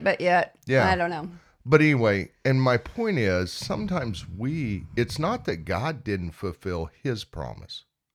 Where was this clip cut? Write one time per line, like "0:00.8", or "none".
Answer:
none